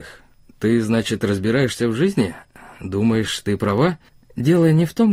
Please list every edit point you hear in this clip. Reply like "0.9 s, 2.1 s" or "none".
none